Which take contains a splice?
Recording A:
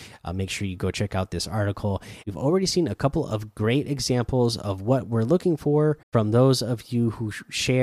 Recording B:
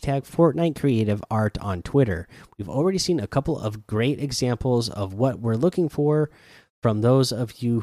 A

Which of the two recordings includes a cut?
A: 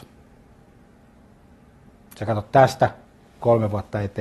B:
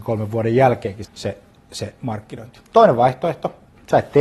B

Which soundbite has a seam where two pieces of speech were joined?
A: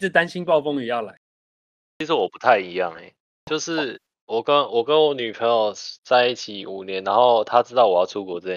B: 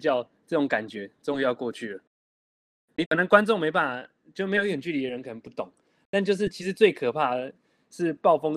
B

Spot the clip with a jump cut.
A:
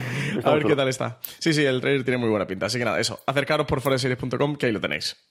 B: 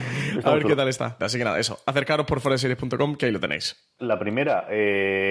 B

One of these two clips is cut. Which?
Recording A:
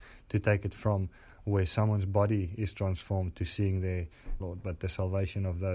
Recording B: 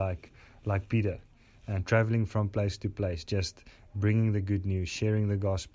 A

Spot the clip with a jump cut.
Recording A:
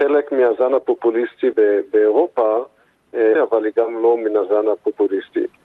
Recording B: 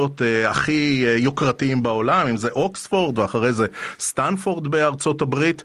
A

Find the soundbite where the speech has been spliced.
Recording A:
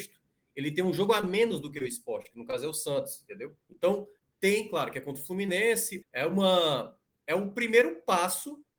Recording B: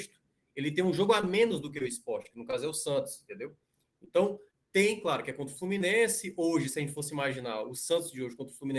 A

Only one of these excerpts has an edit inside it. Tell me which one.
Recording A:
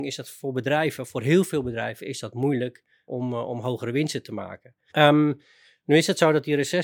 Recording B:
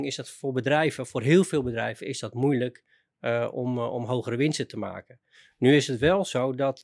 A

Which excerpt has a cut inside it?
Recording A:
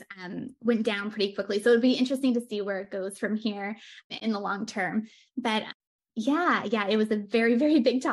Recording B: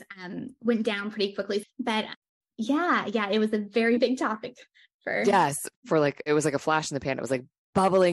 B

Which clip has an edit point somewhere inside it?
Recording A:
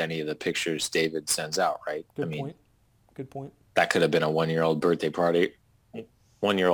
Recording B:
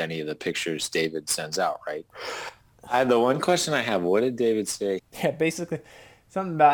B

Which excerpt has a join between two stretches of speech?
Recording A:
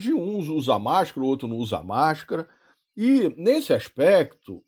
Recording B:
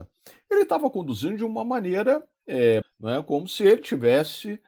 B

